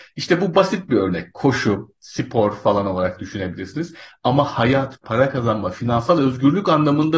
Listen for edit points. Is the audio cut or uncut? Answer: cut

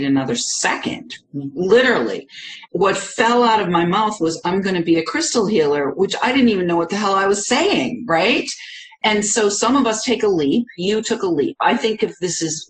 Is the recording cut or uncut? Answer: cut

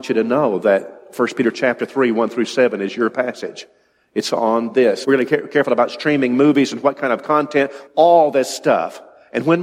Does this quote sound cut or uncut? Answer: cut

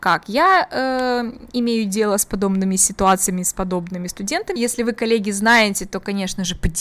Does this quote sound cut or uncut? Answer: cut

